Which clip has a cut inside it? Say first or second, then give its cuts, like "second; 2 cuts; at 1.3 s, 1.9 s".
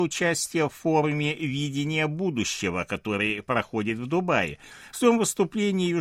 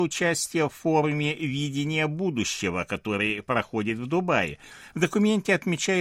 second; 1 cut; at 4.9 s